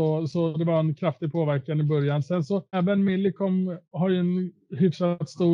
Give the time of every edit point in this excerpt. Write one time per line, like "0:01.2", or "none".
0:02.7